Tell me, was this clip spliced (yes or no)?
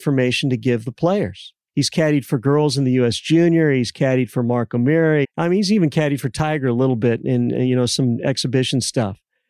yes